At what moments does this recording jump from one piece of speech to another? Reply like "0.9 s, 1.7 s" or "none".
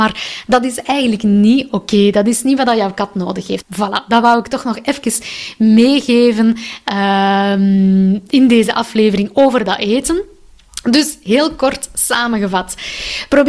3.6 s